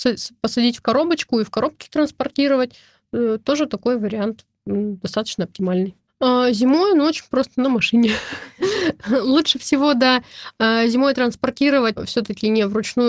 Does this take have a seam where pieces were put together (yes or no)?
no